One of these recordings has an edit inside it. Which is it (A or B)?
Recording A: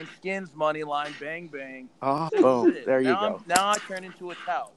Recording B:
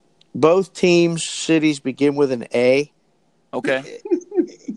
A